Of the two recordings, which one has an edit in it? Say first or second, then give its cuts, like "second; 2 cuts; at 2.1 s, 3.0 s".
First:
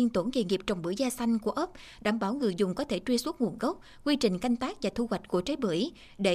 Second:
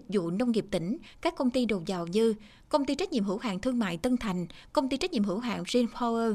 first; 1 cut; at 2.0 s